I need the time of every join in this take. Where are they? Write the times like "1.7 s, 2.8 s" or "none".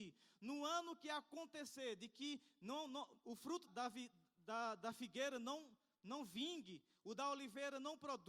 3.7 s

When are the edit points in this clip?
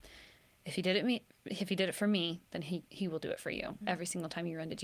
3.8 s

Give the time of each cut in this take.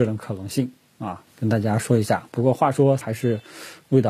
1.3 s, 3.0 s

